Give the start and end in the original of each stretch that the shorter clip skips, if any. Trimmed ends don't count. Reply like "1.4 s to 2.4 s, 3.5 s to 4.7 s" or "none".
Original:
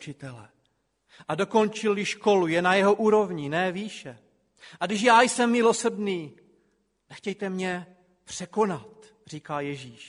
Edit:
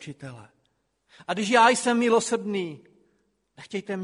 1.2 s to 4.8 s